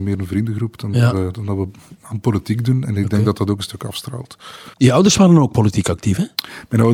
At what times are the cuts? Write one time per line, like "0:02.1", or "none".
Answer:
0:04.7